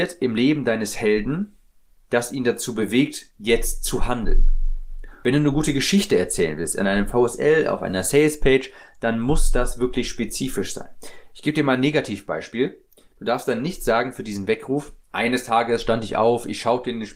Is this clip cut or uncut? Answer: cut